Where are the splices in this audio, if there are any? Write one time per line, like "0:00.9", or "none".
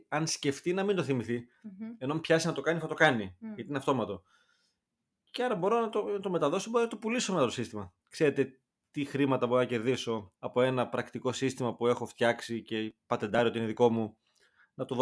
0:10.4